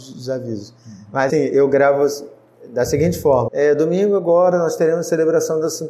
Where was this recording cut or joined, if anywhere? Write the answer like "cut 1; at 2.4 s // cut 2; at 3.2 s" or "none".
cut 1; at 1.3 s // cut 2; at 3.5 s